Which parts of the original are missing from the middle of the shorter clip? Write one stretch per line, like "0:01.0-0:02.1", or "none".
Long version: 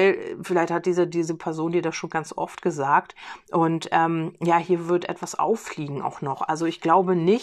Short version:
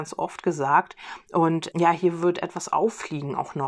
0:03.9-0:04.4

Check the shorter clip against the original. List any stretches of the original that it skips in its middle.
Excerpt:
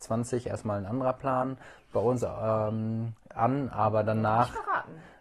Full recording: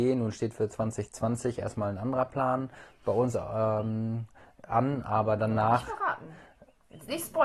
0:04.4-0:04.6

